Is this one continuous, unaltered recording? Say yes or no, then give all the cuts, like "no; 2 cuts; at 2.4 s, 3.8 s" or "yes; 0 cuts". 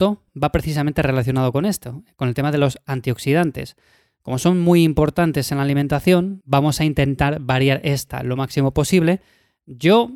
yes; 0 cuts